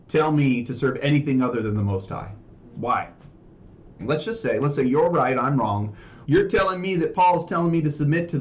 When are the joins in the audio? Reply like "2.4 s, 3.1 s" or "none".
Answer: 4.0 s, 6.2 s